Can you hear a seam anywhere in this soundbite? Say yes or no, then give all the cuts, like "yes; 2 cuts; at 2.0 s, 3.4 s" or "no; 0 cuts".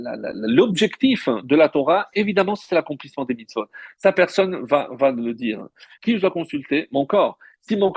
yes; 1 cut; at 6.0 s